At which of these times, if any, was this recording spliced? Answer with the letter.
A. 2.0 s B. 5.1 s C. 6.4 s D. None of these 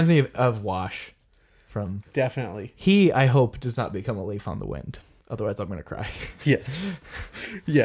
A